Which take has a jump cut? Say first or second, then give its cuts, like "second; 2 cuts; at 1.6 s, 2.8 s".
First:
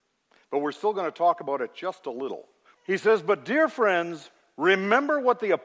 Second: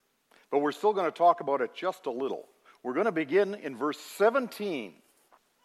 first; 1 cut; at 2.7 s